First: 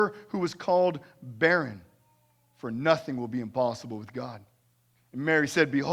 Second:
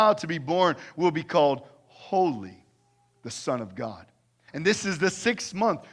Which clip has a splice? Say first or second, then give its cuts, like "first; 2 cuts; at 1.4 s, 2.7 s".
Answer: second; 1 cut; at 4.5 s